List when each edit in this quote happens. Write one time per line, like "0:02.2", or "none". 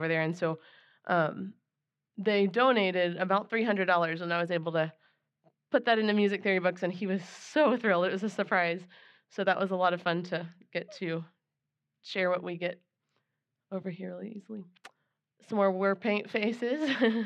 none